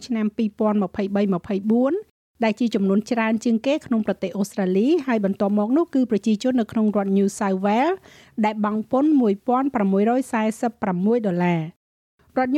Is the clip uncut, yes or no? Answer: yes